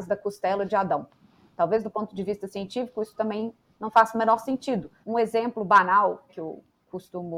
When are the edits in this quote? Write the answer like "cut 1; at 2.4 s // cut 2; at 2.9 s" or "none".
cut 1; at 5.0 s // cut 2; at 6.3 s